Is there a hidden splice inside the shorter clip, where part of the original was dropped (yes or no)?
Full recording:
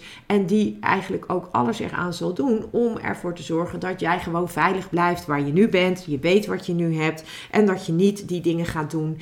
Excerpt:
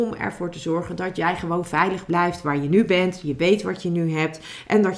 no